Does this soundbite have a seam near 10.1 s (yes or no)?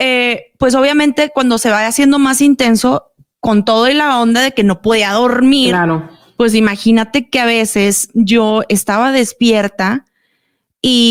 no